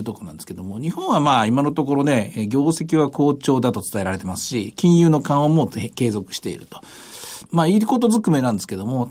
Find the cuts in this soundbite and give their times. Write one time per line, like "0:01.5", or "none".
0:07.5